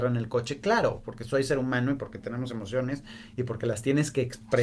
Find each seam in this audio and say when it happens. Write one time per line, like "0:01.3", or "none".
none